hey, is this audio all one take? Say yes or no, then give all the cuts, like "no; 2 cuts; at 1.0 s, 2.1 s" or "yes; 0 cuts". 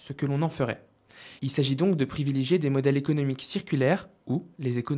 no; 1 cut; at 1.4 s